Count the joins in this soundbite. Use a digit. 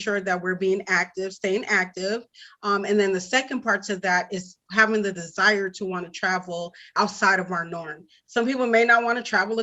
0